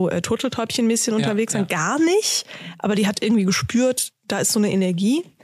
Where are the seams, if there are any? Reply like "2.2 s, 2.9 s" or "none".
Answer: none